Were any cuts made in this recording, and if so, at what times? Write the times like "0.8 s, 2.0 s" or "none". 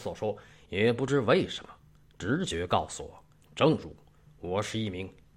3.4 s